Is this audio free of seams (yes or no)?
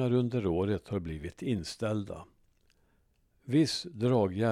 yes